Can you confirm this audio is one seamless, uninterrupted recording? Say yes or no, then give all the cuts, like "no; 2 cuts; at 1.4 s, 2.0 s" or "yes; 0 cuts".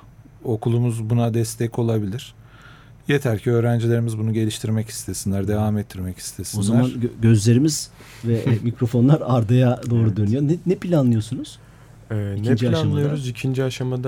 yes; 0 cuts